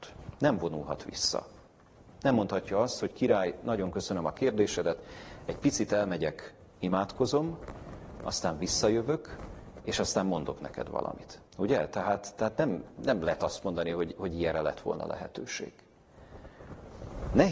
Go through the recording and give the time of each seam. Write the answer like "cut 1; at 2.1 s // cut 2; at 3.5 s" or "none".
cut 1; at 11.5 s